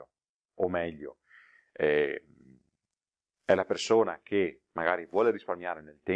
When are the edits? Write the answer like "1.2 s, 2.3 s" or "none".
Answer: none

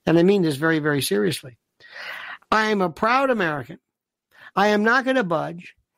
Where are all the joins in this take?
none

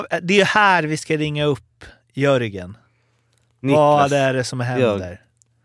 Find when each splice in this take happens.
none

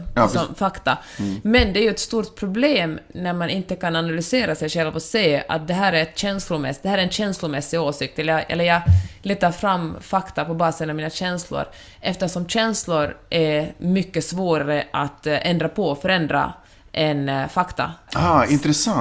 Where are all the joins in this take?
18.1 s

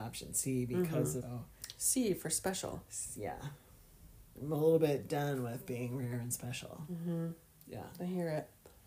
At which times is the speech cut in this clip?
1.2 s

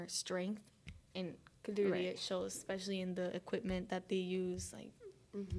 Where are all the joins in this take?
none

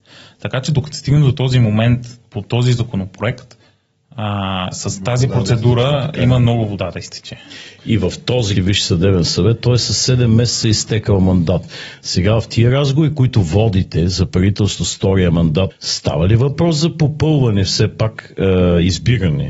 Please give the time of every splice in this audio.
8.5 s, 15.7 s

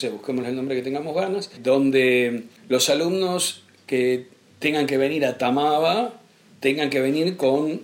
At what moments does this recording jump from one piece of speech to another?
none

